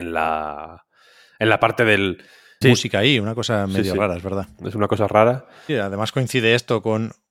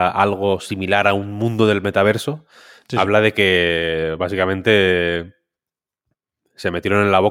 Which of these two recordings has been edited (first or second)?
first